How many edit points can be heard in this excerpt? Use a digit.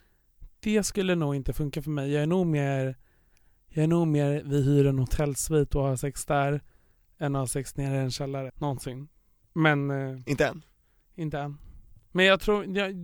1